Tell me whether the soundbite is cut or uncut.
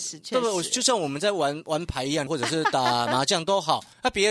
cut